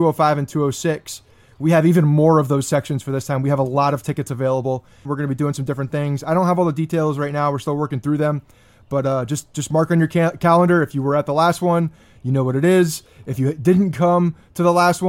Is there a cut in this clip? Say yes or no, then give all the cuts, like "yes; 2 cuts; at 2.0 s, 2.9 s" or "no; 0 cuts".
yes; 1 cut; at 5.0 s